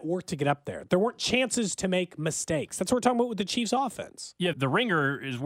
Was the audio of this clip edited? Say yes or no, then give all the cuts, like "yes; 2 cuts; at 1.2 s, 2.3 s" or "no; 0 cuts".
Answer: yes; 1 cut; at 4.5 s